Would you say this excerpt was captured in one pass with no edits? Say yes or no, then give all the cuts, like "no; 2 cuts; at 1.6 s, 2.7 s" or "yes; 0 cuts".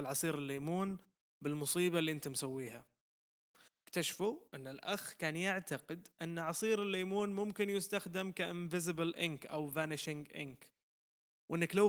yes; 0 cuts